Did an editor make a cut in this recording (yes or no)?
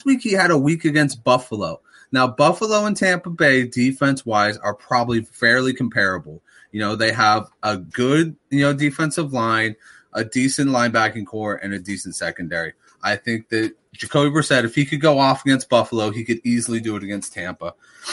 no